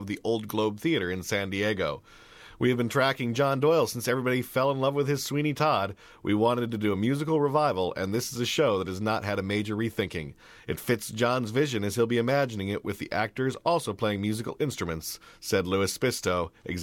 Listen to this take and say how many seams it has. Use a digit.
0